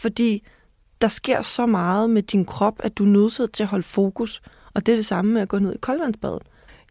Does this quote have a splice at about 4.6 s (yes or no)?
no